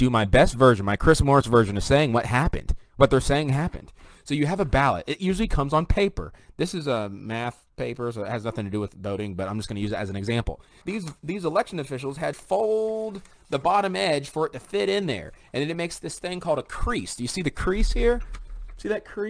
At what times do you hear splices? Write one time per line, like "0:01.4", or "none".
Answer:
0:10.8
0:12.3